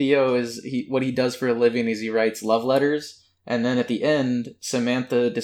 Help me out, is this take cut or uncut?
uncut